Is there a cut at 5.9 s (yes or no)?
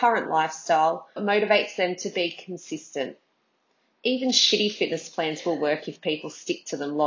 no